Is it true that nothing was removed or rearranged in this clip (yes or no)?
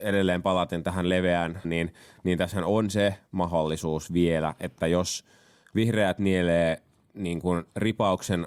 no